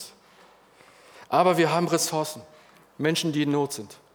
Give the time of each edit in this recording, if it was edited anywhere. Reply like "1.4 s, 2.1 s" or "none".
2.8 s